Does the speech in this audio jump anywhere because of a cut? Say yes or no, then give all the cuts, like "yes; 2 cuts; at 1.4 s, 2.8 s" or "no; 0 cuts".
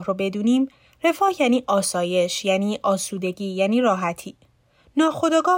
no; 0 cuts